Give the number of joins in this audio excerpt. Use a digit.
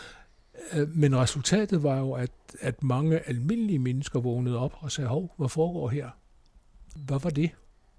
0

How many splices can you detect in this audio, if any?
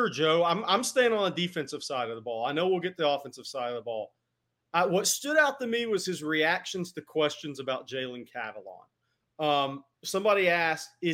1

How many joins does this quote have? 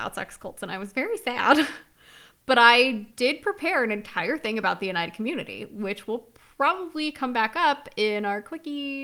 0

